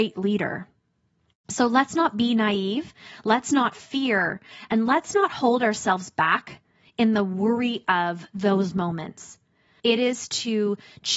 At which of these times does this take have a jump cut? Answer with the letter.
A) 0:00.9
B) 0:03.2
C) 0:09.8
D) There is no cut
C